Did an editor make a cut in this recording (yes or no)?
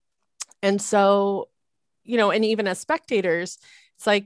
no